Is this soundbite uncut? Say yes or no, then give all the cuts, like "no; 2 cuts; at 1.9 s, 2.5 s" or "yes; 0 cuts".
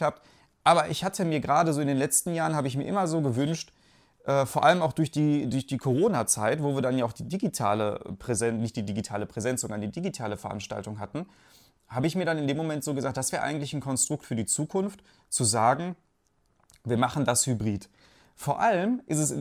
yes; 0 cuts